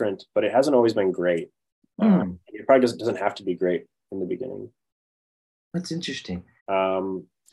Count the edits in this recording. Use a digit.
1